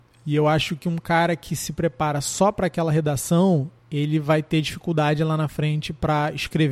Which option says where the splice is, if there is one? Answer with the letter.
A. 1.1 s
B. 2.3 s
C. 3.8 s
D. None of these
C